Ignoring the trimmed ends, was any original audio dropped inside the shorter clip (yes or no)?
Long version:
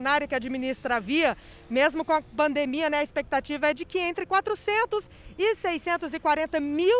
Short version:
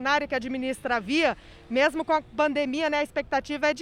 no